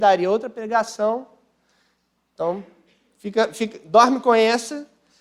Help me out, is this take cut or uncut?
uncut